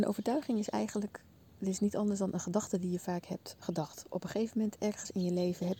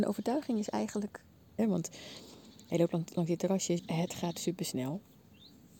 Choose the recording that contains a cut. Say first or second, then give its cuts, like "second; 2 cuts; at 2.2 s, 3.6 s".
second; 2 cuts; at 1.6 s, 3.8 s